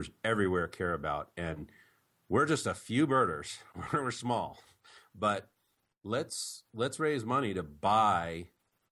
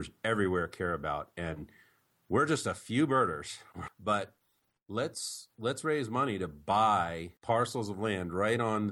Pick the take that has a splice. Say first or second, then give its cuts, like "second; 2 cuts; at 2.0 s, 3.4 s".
second; 2 cuts; at 3.9 s, 7.4 s